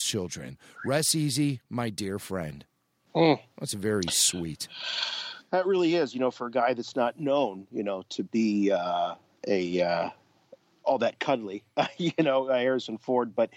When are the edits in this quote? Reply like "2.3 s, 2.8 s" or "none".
none